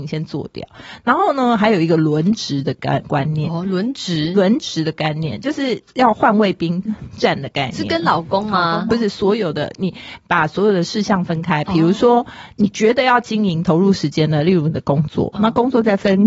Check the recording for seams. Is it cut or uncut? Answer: uncut